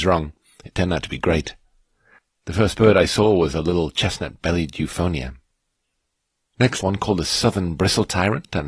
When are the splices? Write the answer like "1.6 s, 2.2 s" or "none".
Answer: 6.8 s